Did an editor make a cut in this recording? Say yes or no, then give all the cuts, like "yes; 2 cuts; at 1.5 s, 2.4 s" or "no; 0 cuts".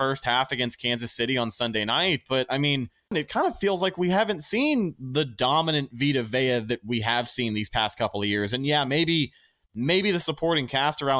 yes; 1 cut; at 3.1 s